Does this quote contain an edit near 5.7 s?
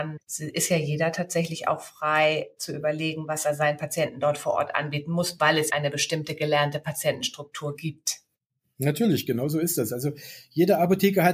yes; 1 cut; at 5.7 s

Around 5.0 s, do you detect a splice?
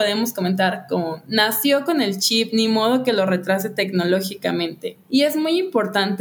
yes; 1 cut; at 5.0 s

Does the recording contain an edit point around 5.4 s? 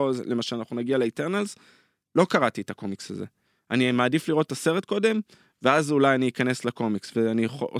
no; 0 cuts

